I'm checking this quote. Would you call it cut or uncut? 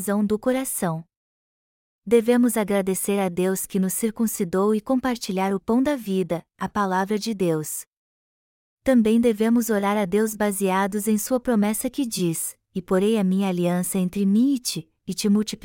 uncut